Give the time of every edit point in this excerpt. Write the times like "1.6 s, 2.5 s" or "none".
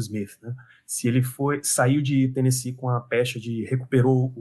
none